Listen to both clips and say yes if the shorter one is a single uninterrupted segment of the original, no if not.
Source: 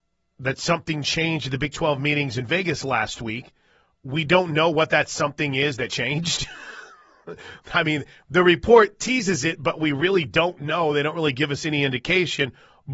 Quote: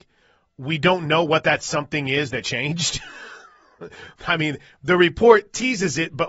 yes